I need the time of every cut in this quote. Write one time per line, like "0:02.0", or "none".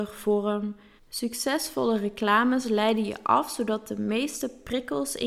0:01.0